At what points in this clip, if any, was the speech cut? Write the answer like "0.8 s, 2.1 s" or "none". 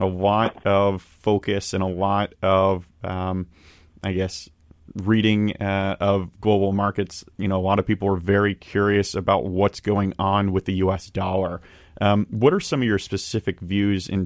none